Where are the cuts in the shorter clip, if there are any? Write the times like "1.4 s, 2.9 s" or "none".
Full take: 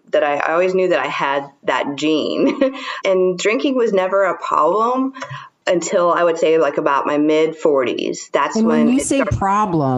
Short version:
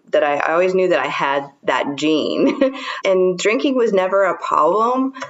none